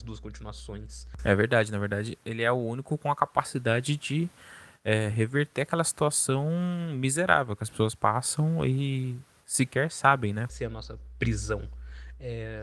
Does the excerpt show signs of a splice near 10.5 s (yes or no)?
yes